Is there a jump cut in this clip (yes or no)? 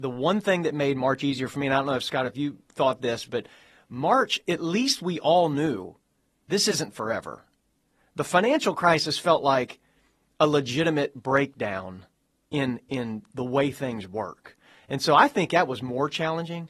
no